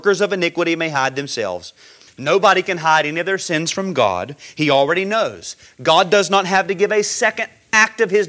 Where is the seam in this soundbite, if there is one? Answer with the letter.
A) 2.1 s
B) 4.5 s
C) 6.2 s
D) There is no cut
A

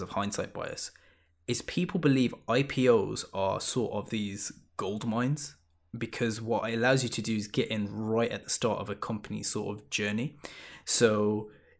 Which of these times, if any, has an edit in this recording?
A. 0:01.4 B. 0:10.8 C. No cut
C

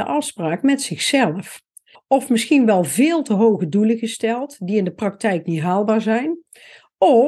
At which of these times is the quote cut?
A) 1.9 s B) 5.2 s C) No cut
A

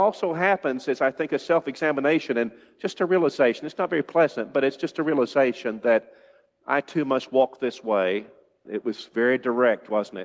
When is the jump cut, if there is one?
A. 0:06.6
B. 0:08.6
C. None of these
B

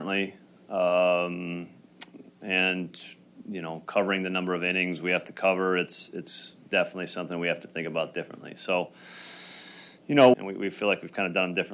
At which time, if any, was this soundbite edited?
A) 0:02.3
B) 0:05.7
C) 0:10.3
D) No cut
C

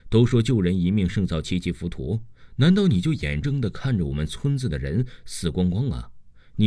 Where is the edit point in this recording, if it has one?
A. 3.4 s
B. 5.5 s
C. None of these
A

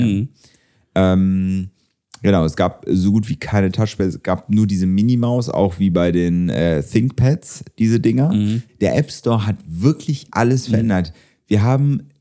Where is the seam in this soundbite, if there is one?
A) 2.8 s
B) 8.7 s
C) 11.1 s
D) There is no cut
B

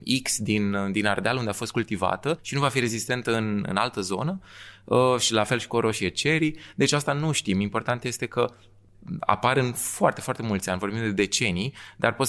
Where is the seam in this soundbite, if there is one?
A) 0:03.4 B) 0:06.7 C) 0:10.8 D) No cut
D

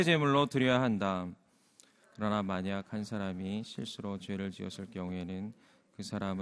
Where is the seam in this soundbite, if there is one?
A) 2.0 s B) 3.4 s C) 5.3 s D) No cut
A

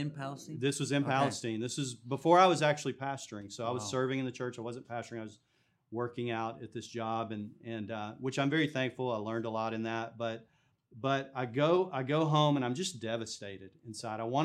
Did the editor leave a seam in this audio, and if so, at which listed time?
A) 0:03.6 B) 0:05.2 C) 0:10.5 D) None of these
D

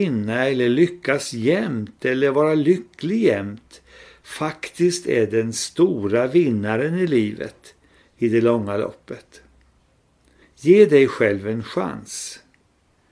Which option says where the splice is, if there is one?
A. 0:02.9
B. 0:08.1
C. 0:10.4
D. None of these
C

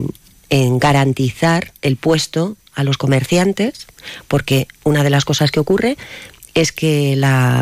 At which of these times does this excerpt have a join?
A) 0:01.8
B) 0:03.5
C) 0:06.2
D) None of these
A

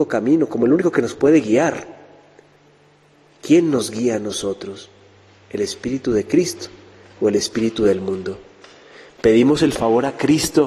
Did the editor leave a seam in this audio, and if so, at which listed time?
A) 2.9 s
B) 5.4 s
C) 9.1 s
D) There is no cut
D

